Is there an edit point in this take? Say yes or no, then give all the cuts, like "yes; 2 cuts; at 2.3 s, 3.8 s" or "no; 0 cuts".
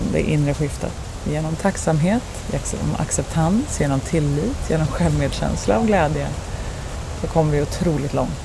no; 0 cuts